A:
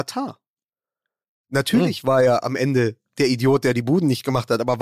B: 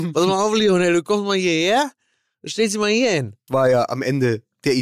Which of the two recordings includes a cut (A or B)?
B